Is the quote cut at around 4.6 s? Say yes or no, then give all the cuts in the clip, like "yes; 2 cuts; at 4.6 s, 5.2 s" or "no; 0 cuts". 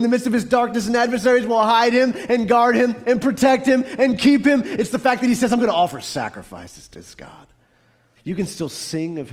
no; 1 cut; at 8.2 s